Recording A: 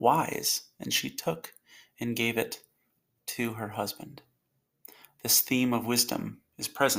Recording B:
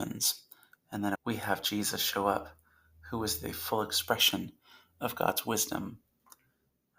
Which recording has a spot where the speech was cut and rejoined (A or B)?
B